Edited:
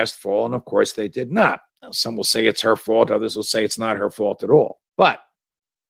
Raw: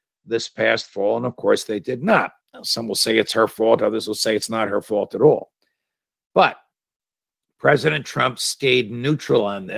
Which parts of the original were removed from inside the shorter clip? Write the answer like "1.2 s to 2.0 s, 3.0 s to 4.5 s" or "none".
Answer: 5.6 s to 6.2 s